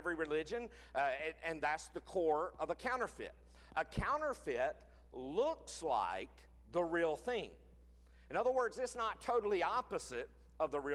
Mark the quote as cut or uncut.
uncut